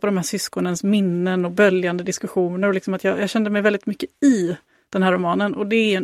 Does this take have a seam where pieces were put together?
no; 0 cuts

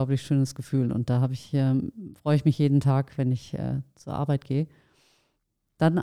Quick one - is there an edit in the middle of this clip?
no; 0 cuts

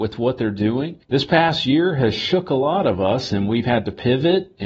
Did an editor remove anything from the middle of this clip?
yes; 1 cut; at 1.0 s

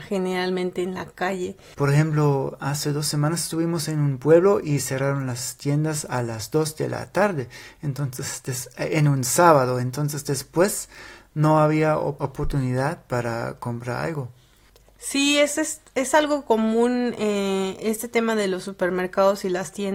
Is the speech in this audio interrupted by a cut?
yes; 1 cut; at 1.7 s

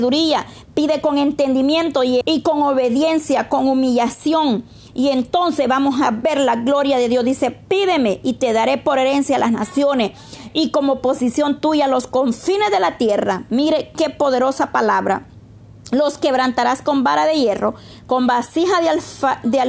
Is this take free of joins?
no; 1 cut; at 2.2 s

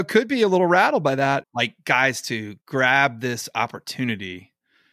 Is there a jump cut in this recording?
yes; 2 cuts; at 1.4 s, 2.6 s

